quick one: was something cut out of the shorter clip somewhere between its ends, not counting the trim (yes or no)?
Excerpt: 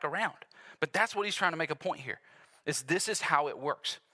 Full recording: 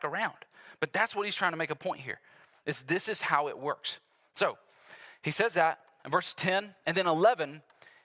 no